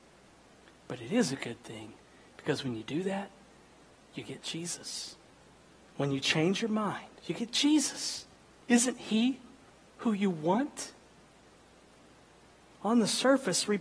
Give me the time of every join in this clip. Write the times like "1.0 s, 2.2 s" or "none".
7.2 s